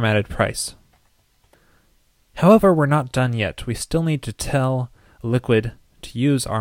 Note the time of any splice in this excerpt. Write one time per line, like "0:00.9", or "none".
none